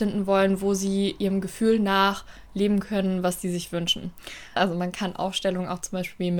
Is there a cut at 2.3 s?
no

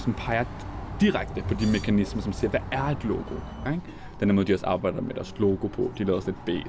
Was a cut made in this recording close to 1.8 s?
no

